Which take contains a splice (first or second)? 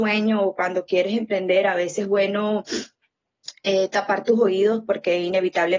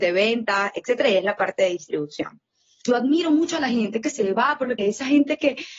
second